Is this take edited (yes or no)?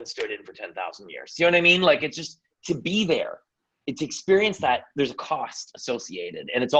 no